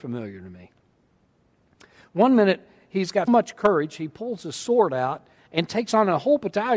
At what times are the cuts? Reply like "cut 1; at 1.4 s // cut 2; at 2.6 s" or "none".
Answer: cut 1; at 3.3 s